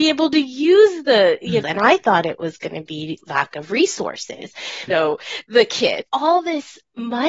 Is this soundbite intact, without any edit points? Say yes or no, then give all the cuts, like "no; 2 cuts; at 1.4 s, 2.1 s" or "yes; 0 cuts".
no; 3 cuts; at 1.6 s, 4.9 s, 6.1 s